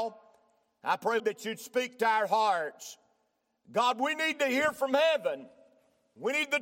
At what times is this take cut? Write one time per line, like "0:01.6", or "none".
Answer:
0:01.2